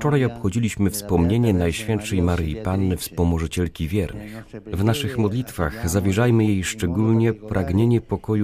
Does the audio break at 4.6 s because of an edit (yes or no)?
no